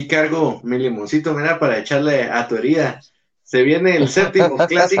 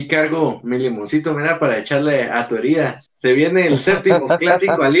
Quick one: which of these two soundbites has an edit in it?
second; 1 cut; at 3.1 s

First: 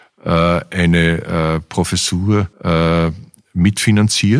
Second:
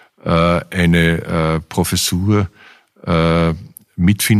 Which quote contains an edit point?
first; 1 cut; at 2.5 s

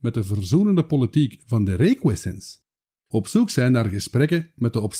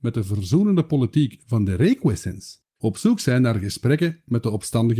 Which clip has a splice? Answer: second; 1 cut; at 2.7 s

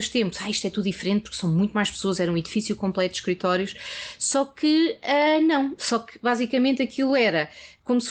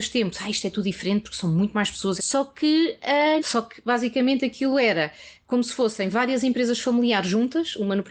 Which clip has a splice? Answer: second; 2 cuts; at 2.2 s, 3.4 s

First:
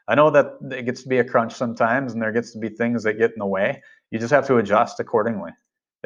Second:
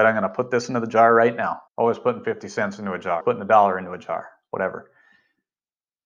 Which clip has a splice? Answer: second; 2 cuts; at 1.7 s, 3.2 s

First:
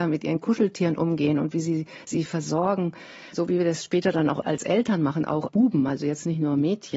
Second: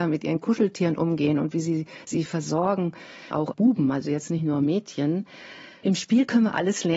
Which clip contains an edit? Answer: second; 1 cut; at 3.3 s

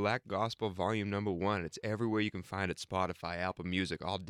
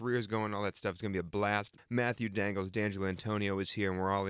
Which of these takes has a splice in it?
second; 1 cut; at 1.8 s

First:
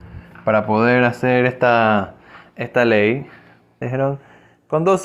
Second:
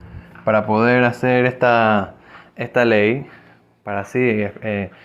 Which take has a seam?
first; 1 cut; at 3.8 s

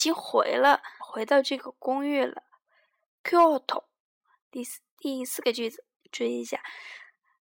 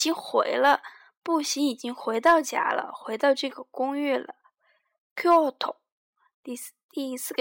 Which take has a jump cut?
first; 2 cuts; at 1.0 s, 6.0 s

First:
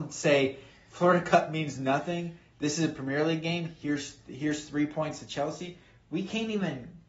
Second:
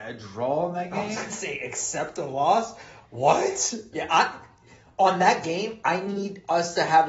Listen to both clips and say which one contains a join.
second; 2 cuts; at 3.9 s, 5.8 s

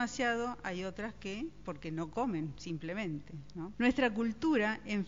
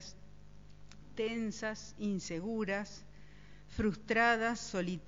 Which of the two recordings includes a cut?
first; 1 cut; at 3.7 s

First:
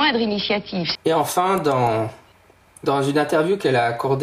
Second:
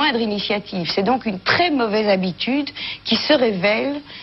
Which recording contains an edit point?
first; 1 cut; at 1.0 s

